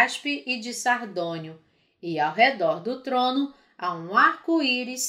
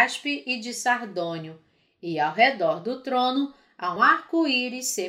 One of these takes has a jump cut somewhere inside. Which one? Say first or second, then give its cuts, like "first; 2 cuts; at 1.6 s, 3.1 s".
second; 1 cut; at 4.0 s